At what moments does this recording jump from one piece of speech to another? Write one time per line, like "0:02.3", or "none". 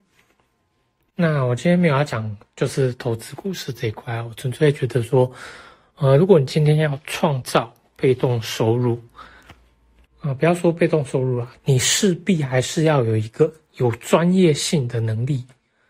0:11.6